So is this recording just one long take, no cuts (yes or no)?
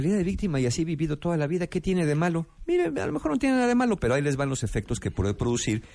yes